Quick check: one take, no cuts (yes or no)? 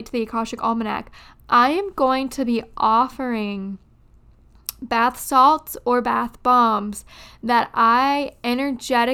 yes